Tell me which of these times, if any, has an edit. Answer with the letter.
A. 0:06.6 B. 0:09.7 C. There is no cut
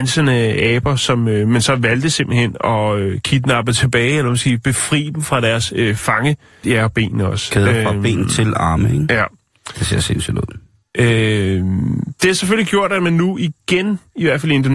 A